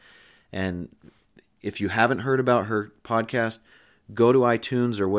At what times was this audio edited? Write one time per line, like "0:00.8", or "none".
none